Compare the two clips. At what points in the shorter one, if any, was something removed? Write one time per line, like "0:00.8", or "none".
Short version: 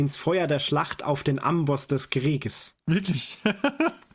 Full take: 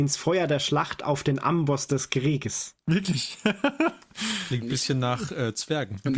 none